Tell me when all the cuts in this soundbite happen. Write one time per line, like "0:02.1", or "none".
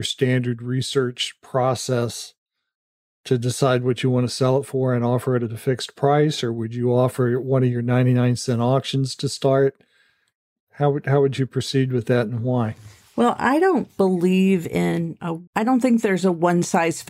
0:15.5